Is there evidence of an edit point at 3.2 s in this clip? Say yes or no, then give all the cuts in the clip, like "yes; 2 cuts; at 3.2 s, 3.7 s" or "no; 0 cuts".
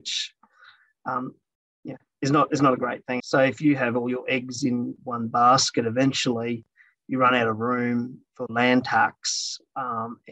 yes; 1 cut; at 3.2 s